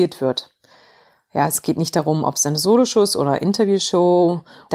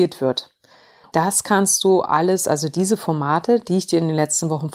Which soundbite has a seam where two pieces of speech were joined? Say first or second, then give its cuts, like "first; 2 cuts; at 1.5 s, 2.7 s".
second; 1 cut; at 1.0 s